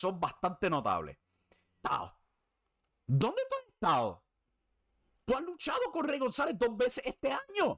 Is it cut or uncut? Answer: cut